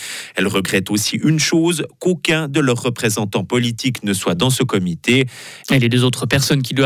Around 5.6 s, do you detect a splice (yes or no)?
yes